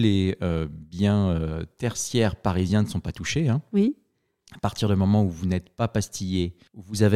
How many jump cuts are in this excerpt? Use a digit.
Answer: 0